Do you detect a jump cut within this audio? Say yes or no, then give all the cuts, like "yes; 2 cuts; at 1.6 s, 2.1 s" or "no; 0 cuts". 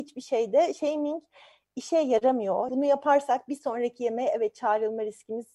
yes; 1 cut; at 2.7 s